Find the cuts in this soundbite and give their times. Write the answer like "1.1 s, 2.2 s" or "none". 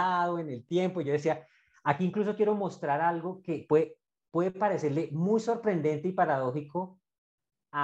none